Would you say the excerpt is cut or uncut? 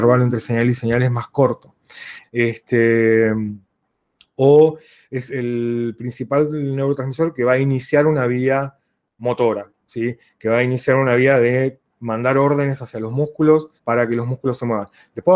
cut